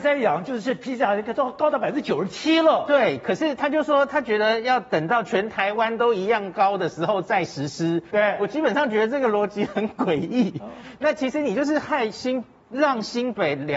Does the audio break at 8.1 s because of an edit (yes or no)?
yes